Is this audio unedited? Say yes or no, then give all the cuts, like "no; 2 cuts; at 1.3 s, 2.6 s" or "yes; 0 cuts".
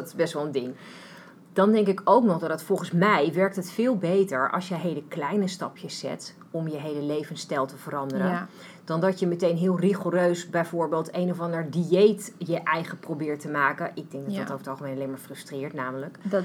yes; 0 cuts